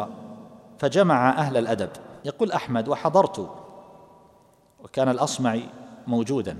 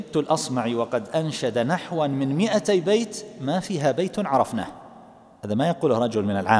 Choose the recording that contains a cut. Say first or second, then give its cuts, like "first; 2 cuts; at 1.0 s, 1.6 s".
first; 1 cut; at 2.2 s